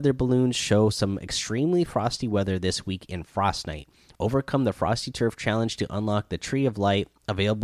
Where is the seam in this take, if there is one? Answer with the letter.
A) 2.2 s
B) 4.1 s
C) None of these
B